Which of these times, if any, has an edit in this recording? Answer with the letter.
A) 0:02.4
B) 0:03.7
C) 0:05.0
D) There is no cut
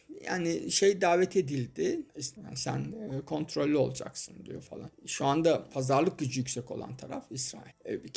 A